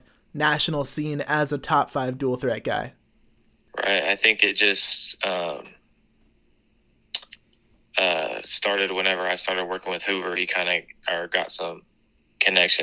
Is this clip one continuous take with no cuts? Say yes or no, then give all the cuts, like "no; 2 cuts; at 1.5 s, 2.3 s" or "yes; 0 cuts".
yes; 0 cuts